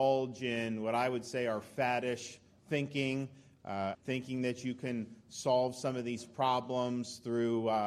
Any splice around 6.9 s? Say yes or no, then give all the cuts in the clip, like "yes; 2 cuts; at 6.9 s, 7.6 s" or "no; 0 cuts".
no; 1 cut; at 3.9 s